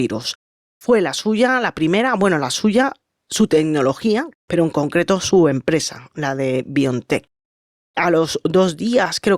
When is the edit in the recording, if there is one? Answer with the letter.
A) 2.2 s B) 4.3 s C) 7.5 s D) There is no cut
B